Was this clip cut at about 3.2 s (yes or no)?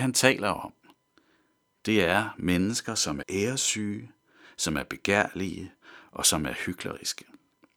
yes